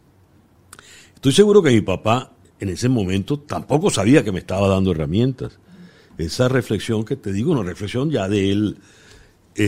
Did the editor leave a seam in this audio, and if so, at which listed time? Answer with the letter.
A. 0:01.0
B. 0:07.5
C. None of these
C